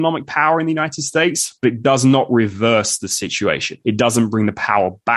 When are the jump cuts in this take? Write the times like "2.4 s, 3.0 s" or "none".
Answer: 3.8 s